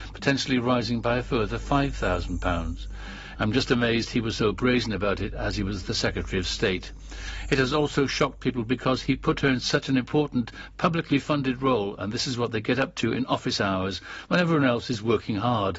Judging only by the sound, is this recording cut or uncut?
cut